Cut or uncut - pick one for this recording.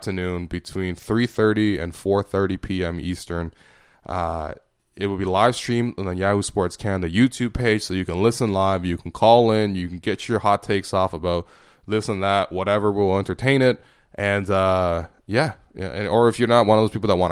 uncut